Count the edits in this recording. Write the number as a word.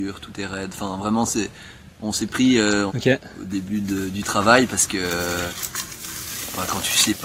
one